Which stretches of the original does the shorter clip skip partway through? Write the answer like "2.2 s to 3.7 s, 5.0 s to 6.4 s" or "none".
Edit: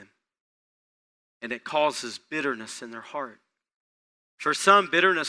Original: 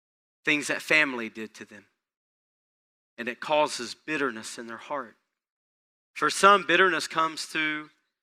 none